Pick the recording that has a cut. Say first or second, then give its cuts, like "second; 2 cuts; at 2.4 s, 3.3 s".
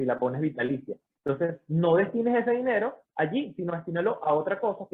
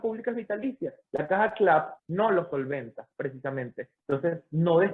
second; 2 cuts; at 2.0 s, 4.0 s